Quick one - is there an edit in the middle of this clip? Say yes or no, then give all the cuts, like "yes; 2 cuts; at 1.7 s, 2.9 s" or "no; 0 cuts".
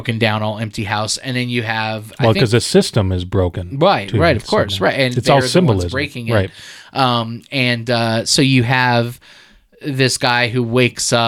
no; 0 cuts